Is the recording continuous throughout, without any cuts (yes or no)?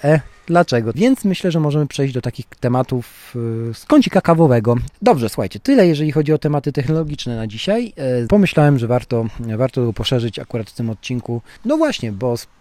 no